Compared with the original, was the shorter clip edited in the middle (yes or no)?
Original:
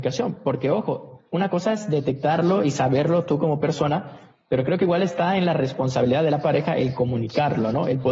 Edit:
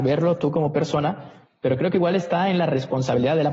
no